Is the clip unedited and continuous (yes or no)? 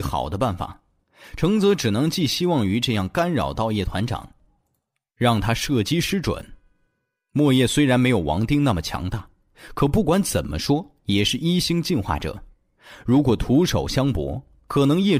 yes